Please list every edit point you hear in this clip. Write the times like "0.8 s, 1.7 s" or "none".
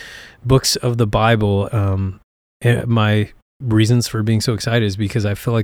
1.7 s, 2.8 s

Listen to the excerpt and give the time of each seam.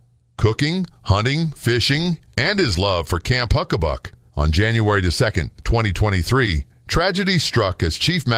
4.3 s

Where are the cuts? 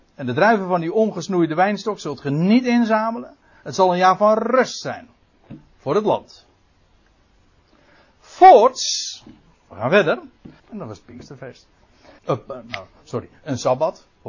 10.6 s, 12.2 s

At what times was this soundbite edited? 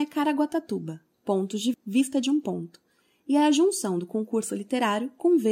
1.7 s

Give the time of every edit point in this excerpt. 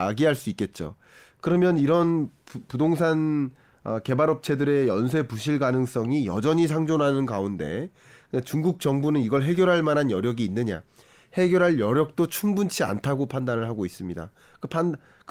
none

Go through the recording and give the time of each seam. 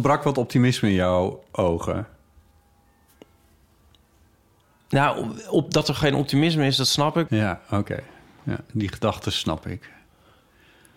7.3 s

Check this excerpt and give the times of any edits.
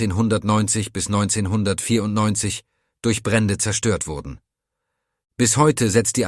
none

